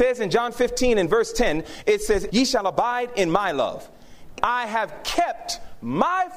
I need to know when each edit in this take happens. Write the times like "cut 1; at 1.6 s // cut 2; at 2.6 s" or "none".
cut 1; at 2.3 s // cut 2; at 4.4 s